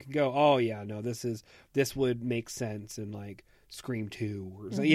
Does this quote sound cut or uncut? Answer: uncut